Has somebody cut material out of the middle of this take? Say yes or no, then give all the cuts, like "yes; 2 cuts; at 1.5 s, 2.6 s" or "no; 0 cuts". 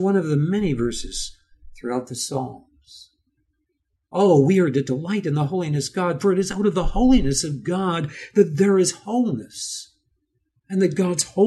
no; 0 cuts